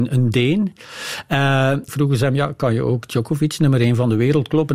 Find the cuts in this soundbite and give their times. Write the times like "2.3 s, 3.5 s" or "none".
1.9 s